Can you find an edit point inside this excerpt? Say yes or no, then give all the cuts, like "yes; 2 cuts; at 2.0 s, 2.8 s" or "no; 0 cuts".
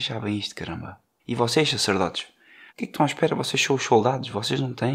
yes; 2 cuts; at 1.2 s, 2.7 s